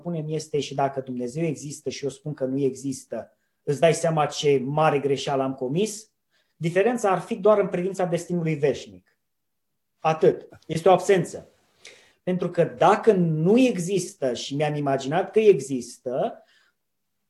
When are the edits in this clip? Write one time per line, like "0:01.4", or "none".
0:06.5
0:10.5
0:12.1